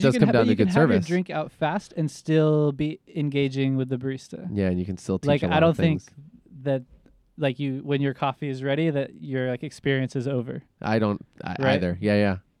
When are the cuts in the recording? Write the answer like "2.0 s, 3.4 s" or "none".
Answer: none